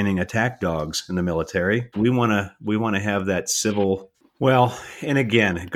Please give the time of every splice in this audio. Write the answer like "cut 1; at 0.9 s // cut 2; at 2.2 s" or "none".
cut 1; at 1.9 s // cut 2; at 4.1 s